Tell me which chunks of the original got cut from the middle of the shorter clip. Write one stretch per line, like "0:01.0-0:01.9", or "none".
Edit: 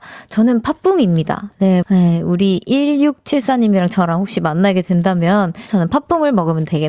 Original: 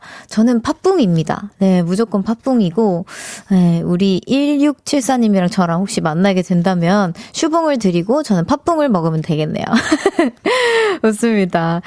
0:01.8-0:03.4
0:07.3-0:08.2